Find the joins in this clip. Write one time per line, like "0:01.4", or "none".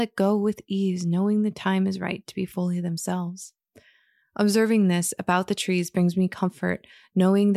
none